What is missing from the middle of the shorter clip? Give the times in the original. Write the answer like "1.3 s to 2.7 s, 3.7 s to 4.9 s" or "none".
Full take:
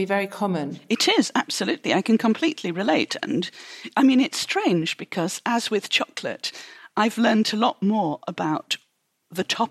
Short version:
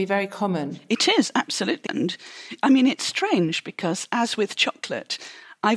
1.9 s to 3.2 s